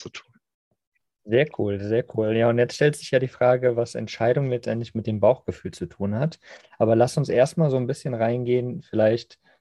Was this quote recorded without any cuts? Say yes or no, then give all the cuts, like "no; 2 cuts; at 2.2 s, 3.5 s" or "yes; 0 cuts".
yes; 0 cuts